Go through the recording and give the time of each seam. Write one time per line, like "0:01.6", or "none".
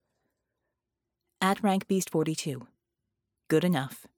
none